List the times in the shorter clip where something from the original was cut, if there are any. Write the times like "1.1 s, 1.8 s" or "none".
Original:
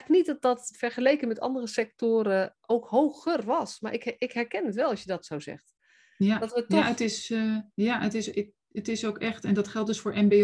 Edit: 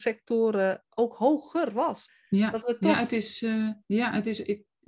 2.1 s